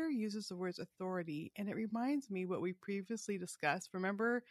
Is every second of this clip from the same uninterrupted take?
yes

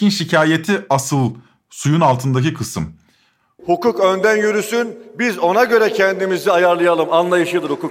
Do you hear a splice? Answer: yes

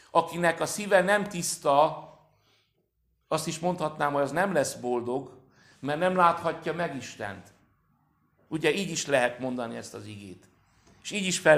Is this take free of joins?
yes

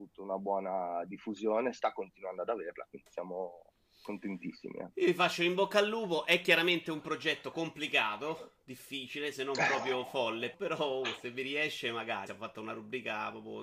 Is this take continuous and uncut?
no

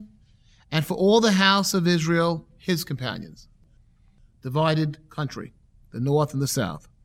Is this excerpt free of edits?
yes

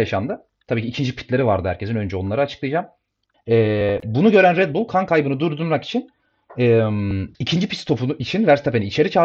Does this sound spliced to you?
yes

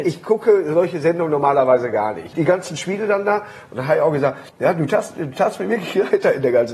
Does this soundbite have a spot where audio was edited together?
yes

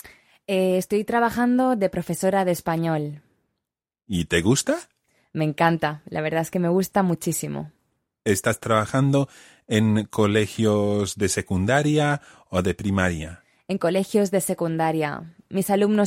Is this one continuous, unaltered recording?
yes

